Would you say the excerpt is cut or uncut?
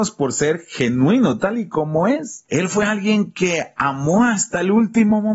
cut